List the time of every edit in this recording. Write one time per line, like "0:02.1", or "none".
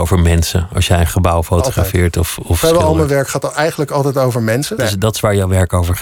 0:04.8